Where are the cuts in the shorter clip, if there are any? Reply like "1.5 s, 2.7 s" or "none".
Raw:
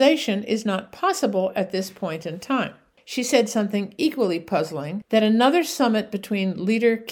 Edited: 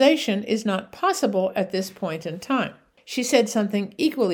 none